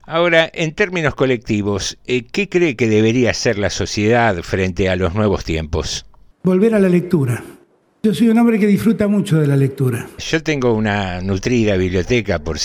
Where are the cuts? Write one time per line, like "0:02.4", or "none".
0:10.2